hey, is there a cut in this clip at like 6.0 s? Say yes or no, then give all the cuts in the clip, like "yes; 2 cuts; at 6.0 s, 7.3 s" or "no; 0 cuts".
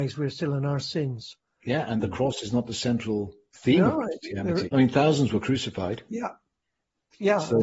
no; 1 cut; at 4.7 s